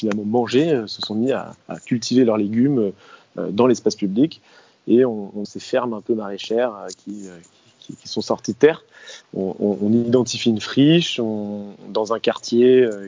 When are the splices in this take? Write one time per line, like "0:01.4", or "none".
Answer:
0:05.4
0:09.2